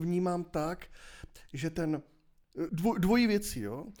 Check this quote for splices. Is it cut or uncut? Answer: cut